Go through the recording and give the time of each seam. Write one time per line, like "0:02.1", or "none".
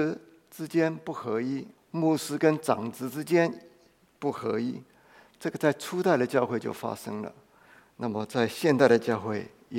0:01.8